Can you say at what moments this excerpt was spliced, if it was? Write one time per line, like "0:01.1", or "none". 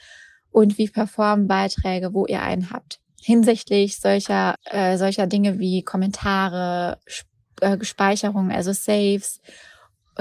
0:04.5